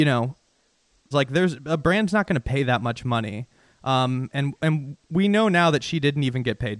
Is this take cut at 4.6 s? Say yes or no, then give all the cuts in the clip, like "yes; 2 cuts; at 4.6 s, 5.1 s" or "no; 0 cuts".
no; 1 cut; at 1.1 s